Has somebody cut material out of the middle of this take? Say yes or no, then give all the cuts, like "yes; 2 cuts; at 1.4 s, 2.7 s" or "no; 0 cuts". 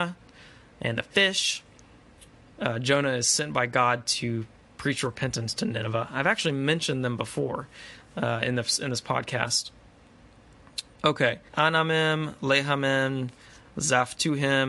yes; 1 cut; at 11.5 s